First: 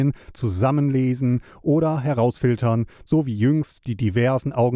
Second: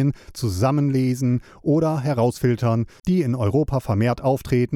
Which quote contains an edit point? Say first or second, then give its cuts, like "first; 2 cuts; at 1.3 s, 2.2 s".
second; 1 cut; at 3.0 s